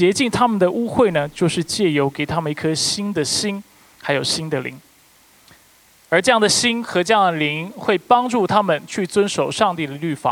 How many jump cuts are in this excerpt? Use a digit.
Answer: 0